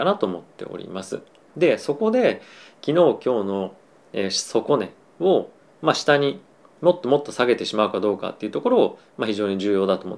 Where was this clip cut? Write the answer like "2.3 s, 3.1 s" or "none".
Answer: 1.5 s